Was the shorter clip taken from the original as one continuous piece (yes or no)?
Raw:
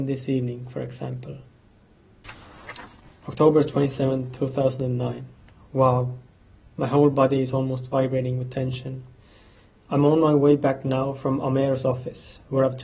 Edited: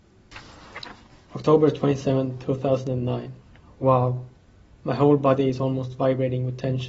yes